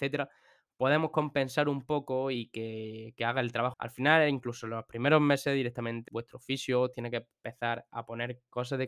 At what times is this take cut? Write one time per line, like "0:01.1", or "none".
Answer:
0:03.7
0:06.1